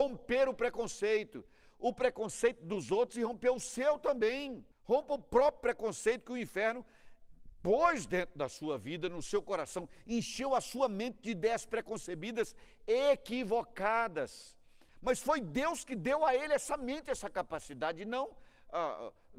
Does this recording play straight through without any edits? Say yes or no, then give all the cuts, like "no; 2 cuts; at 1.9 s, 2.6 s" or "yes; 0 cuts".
no; 2 cuts; at 4.7 s, 14.9 s